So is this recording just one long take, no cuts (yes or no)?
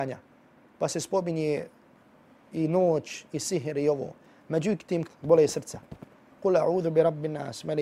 no